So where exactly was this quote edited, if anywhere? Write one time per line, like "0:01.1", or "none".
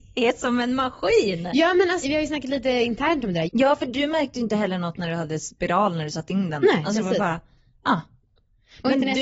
0:02.0
0:03.5

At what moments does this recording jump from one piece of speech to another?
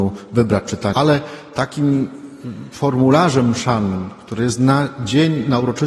0:00.9

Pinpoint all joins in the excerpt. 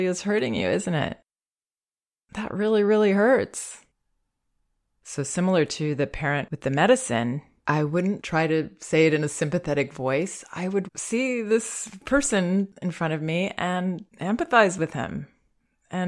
0:10.9
0:14.1

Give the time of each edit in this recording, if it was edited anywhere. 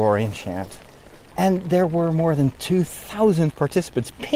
0:01.3

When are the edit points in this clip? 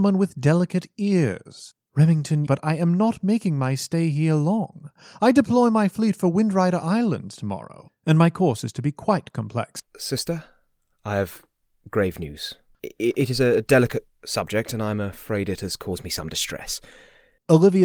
0:02.5
0:09.8
0:12.8

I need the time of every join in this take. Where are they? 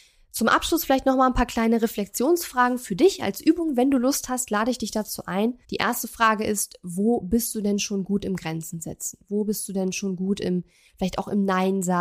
0:05.6

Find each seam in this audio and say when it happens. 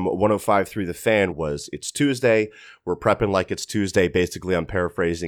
0:01.3

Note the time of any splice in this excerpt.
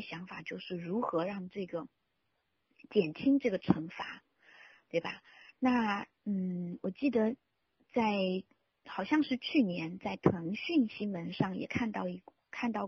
none

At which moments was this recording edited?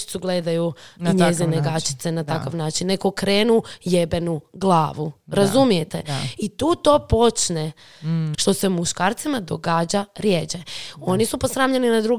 0:08.3

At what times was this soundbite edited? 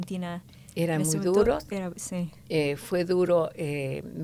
none

